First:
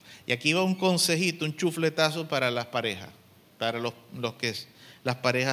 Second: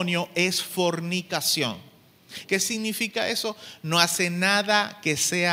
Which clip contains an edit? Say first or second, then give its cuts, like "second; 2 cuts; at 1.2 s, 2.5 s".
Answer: second; 1 cut; at 2.4 s